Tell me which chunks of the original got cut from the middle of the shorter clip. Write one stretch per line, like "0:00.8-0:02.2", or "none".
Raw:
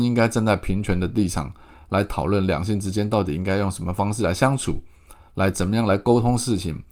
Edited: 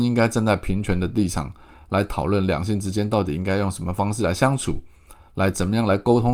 none